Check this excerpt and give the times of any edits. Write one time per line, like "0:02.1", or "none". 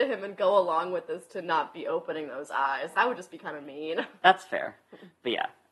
none